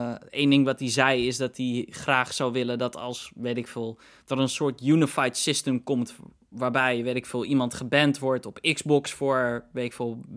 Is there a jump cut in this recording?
no; 0 cuts

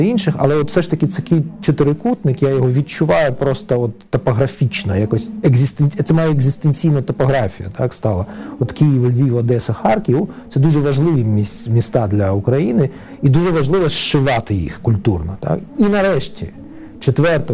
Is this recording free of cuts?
yes; 0 cuts

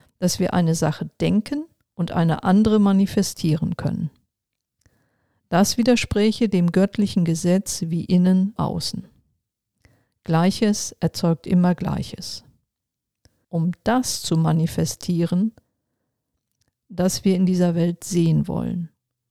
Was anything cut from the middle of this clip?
yes; 2 cuts; at 8.6 s, 13.4 s

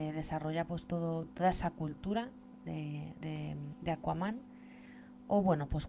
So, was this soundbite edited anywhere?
yes; 2 cuts; at 1.3 s, 3.2 s

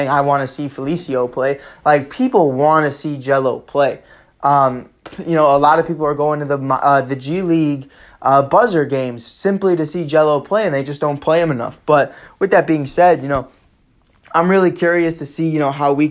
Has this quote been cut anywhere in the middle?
no; 0 cuts

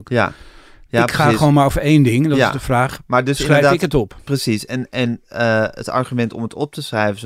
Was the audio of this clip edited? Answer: no; 0 cuts

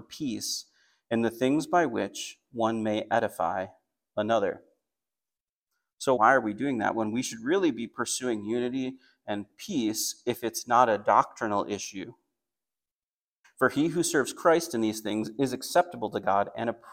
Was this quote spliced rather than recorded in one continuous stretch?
yes; 2 cuts; at 6.2 s, 13.4 s

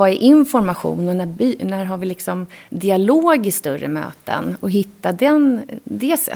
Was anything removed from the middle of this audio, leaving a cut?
no; 0 cuts

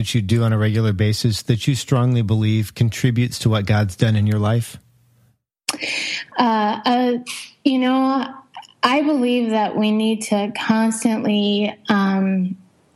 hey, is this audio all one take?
no; 1 cut; at 6.3 s

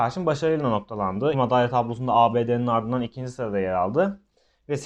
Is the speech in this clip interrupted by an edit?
yes; 1 cut; at 1.3 s

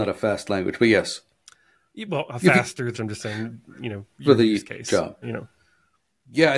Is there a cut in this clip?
yes; 3 cuts; at 2.9 s, 4.2 s, 5.2 s

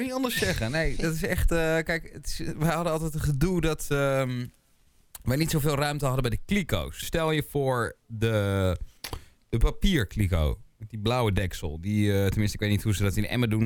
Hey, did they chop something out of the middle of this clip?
yes; 1 cut; at 7.0 s

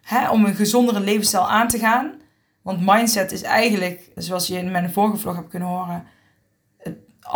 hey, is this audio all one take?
no; 1 cut; at 4.2 s

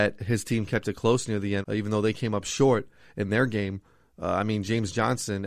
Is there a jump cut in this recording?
no; 0 cuts

